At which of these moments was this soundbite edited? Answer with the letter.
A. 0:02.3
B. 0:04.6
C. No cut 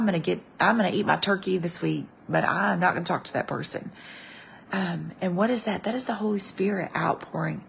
B